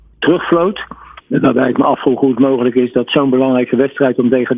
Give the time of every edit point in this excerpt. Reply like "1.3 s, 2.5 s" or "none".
1.2 s